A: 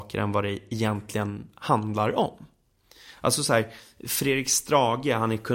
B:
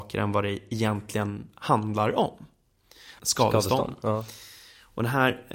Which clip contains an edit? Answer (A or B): B